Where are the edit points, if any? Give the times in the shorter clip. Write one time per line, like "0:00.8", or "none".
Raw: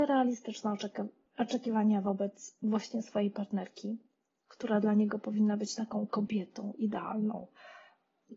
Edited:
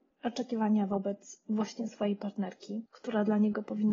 0:02.9